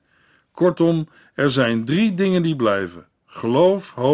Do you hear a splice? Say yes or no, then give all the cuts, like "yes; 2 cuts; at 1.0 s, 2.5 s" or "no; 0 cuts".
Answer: no; 0 cuts